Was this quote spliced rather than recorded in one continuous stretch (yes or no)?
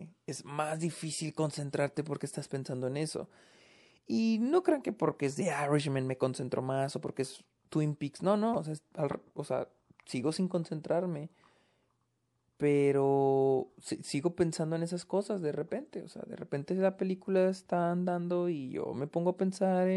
no